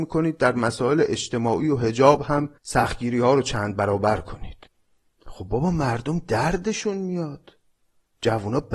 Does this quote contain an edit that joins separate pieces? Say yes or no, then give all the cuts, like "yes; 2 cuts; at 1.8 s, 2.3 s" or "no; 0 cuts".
yes; 1 cut; at 2.6 s